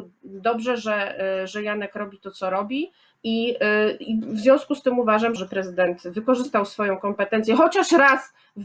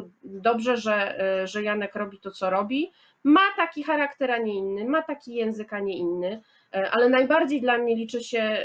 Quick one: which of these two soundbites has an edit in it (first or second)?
first